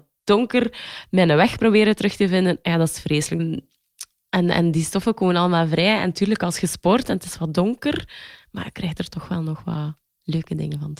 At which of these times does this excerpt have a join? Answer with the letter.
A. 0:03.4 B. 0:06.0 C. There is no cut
A